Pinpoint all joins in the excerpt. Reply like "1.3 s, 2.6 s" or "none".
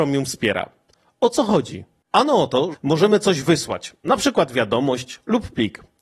2.7 s